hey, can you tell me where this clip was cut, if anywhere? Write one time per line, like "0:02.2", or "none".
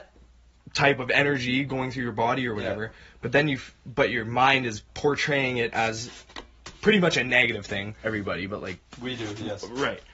0:08.0